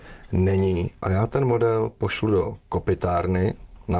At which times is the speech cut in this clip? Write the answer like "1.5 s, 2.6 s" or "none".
none